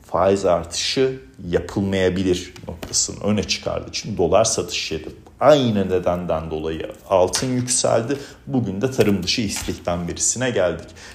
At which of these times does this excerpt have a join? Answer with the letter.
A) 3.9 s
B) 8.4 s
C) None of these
C